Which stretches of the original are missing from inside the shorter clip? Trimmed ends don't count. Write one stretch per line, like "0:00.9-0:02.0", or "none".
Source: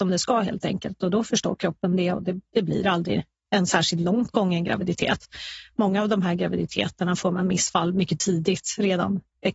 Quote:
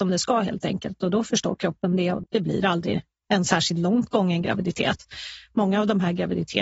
0:02.2-0:02.5